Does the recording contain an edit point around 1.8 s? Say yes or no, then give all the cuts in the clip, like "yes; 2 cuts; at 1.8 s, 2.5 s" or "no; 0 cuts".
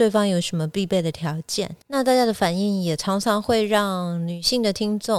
yes; 1 cut; at 1.8 s